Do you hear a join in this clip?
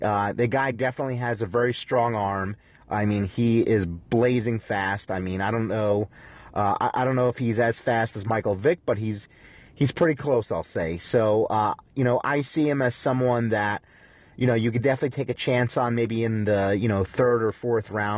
no; 0 cuts

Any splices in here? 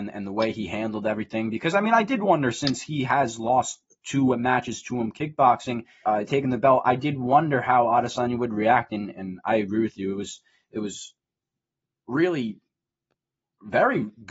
yes; 1 cut; at 6.0 s

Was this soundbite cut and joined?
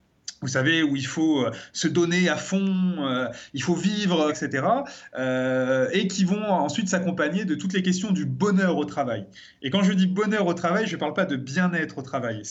yes; 1 cut; at 4.3 s

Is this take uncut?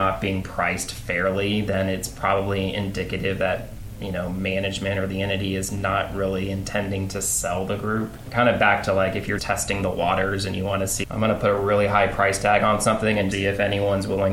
no; 3 cuts; at 9.4 s, 11.0 s, 13.3 s

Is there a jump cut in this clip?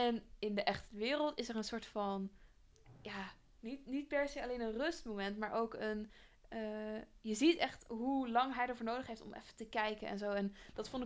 no; 0 cuts

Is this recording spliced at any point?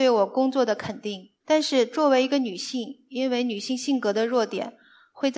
no; 0 cuts

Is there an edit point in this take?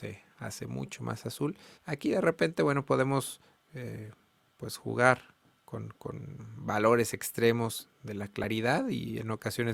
yes; 1 cut; at 1.8 s

